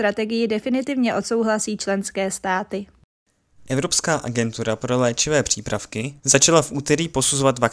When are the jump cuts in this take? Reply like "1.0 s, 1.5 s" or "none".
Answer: 6.2 s

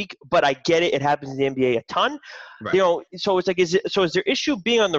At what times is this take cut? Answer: none

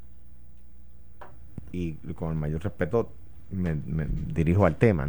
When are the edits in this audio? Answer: 1.7 s

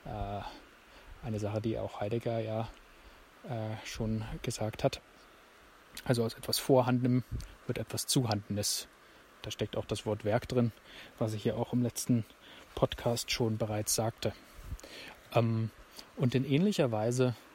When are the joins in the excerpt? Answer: 9.2 s

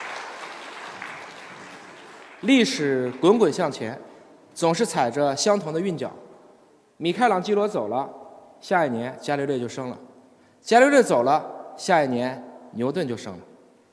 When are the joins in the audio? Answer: none

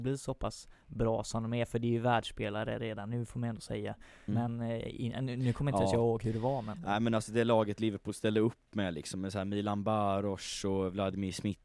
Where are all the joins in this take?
4.3 s

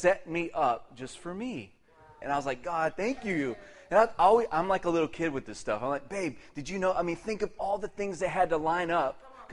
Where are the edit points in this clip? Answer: 2.2 s

